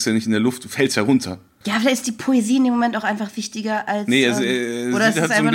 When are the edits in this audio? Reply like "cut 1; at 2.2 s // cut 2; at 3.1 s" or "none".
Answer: cut 1; at 1.6 s